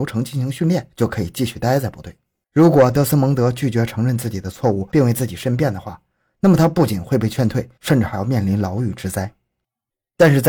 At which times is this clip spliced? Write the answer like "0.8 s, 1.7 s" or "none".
2.4 s